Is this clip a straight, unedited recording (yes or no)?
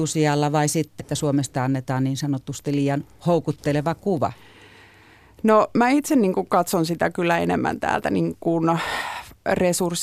no